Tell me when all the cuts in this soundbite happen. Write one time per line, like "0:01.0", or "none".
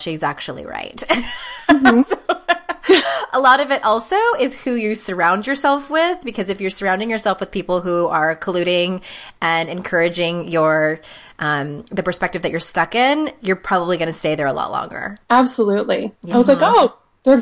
0:15.2
0:16.3